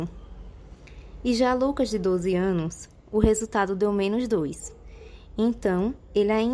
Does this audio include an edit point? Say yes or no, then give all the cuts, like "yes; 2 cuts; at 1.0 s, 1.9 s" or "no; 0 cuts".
no; 0 cuts